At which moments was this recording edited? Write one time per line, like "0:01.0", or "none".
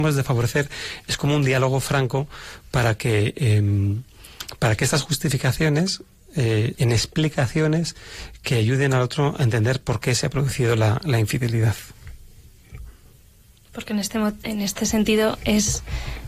0:06.7